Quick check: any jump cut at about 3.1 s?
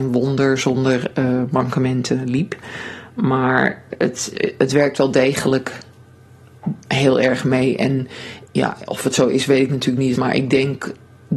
no; 2 cuts; at 8.5 s, 10.1 s

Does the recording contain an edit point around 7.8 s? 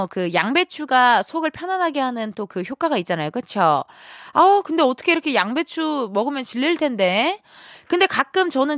no; 0 cuts

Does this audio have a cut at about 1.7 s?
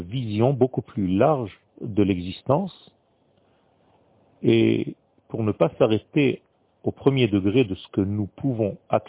yes; 1 cut; at 1.7 s

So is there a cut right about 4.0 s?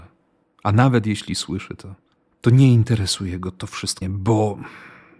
yes; 1 cut; at 4.0 s

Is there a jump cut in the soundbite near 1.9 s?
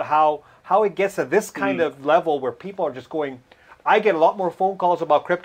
no; 0 cuts

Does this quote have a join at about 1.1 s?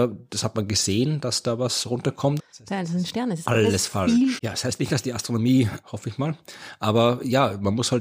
no; 3 cuts; at 2.4 s, 4.4 s, 5.8 s

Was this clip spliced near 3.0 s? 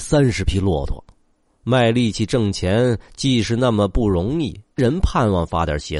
no; 2 cuts; at 1.6 s, 4.8 s

